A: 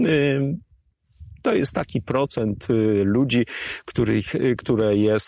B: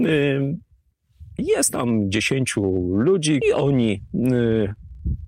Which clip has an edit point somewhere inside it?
B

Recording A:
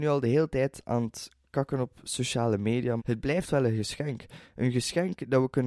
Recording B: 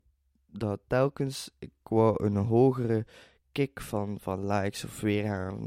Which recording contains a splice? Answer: A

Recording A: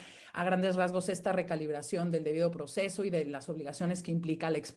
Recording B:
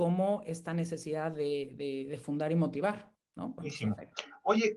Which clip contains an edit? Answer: B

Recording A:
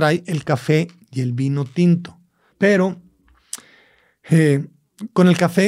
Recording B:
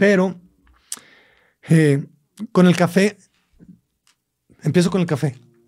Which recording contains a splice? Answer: A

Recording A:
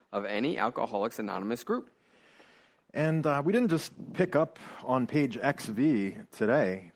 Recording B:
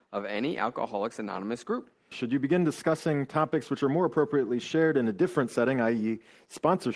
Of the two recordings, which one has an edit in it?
B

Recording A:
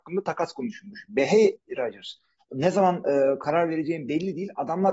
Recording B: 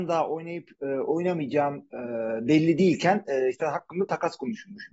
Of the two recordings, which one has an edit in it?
A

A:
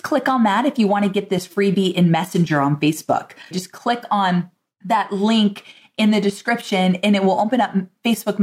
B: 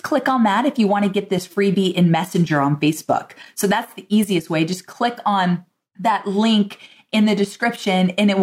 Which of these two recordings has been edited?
A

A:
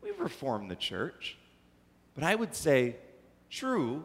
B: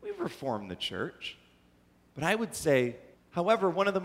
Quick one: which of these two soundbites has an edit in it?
B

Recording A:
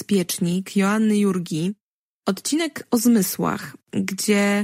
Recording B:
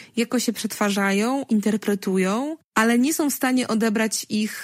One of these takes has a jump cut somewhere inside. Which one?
B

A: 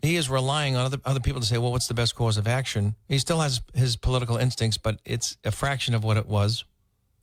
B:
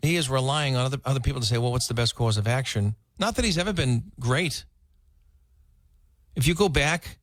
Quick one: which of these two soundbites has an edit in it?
B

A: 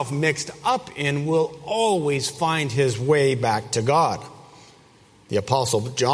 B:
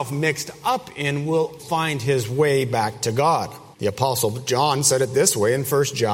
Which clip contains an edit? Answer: B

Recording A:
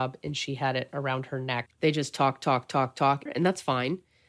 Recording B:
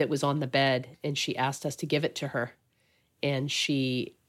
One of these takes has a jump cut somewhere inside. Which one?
A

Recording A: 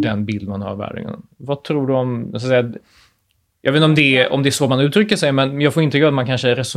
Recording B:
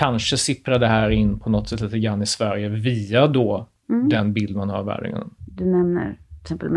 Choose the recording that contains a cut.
B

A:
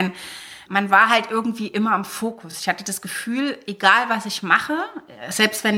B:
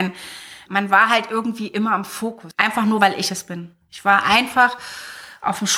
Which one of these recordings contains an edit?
B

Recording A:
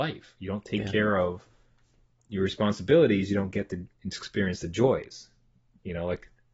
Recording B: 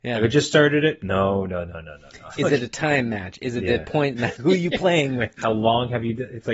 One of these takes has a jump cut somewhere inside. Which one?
B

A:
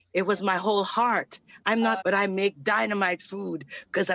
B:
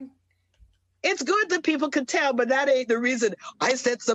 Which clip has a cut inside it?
A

